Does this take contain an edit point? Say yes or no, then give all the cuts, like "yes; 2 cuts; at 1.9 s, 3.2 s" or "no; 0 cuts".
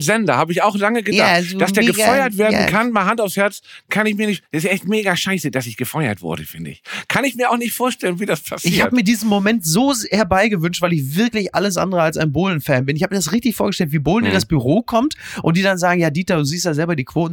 no; 0 cuts